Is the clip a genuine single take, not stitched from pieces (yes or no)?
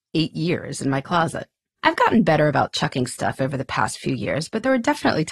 no